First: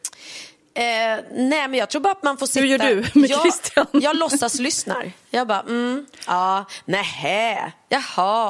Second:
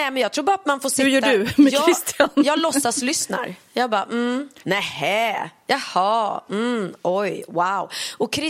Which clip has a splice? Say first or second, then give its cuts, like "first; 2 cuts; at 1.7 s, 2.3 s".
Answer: second; 1 cut; at 4.6 s